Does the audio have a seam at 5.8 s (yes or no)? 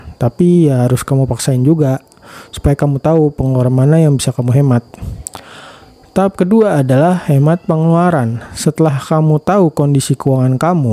no